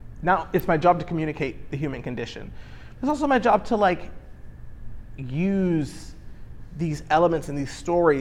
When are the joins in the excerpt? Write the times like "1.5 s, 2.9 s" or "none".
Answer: none